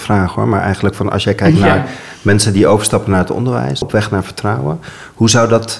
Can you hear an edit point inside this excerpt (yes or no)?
yes